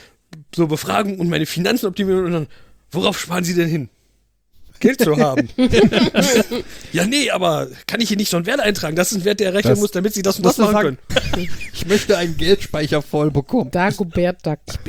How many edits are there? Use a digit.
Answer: 1